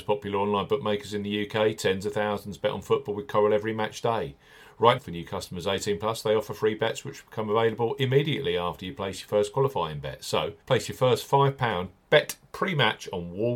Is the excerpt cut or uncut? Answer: cut